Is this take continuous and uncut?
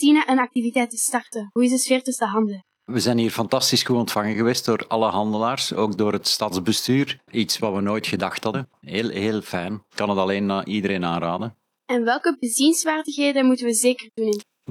yes; 0 cuts

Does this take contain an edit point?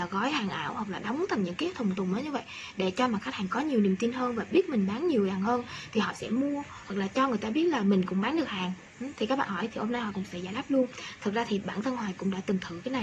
no; 0 cuts

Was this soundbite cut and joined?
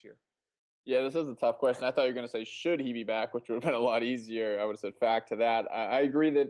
no; 0 cuts

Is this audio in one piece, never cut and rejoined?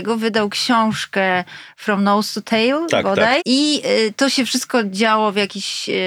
no; 1 cut; at 3.4 s

